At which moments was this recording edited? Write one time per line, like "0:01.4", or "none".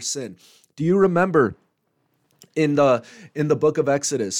none